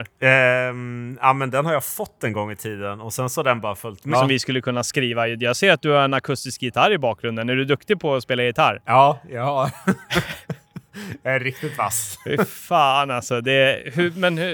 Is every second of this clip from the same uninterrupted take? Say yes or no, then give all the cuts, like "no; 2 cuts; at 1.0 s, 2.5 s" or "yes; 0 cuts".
no; 1 cut; at 4.1 s